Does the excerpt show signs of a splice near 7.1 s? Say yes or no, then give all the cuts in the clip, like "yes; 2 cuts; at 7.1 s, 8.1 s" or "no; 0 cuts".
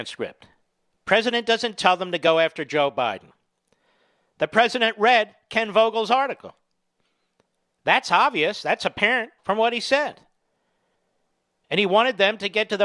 no; 1 cut; at 9.4 s